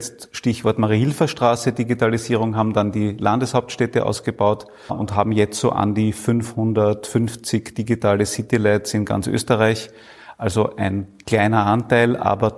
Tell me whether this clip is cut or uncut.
cut